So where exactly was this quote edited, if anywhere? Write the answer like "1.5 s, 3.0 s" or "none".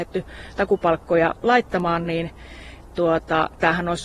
none